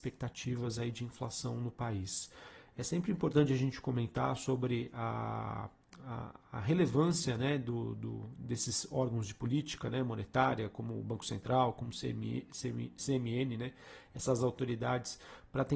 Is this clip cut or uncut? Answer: uncut